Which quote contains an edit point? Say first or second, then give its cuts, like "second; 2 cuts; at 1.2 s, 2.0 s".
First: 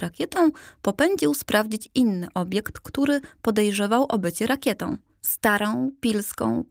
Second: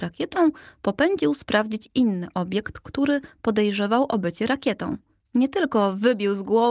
second; 1 cut; at 5.2 s